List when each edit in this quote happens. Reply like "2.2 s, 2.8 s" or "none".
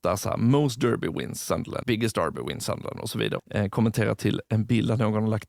1.8 s, 3.4 s